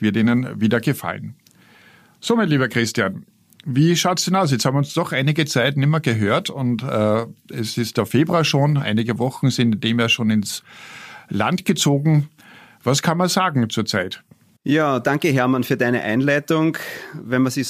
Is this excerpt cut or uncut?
uncut